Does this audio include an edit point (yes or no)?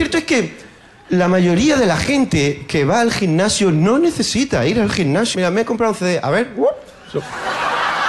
yes